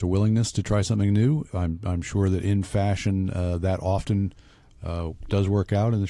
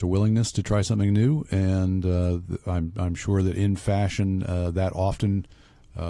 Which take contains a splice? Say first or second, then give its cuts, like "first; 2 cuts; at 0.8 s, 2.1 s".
first; 1 cut; at 1.5 s